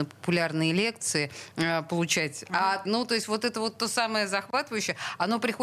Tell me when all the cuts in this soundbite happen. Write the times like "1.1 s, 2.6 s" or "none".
2.9 s